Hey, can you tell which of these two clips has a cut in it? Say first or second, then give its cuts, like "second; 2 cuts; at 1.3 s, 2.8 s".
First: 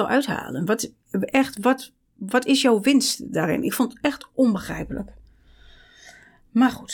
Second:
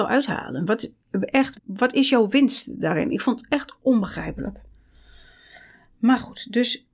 second; 1 cut; at 1.6 s